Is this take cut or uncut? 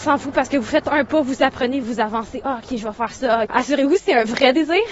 cut